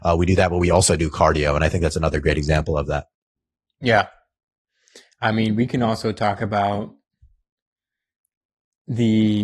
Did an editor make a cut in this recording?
no; 0 cuts

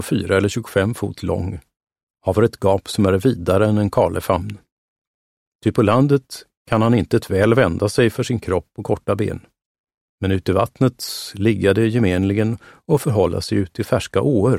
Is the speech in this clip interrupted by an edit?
yes; 1 cut; at 5.5 s

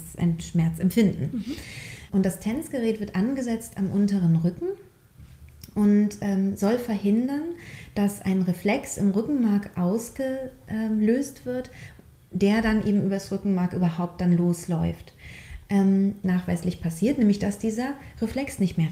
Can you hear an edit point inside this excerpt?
yes; 2 cuts; at 2.1 s, 16.2 s

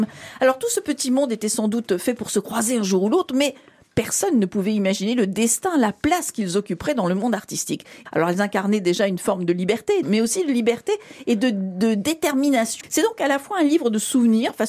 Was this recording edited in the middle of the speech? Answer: yes; 2 cuts; at 10.0 s, 12.8 s

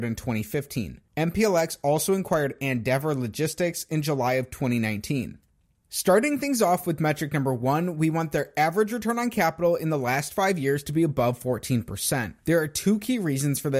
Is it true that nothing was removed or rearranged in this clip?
yes; 0 cuts

